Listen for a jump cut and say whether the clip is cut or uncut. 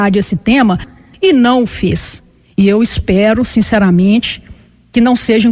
cut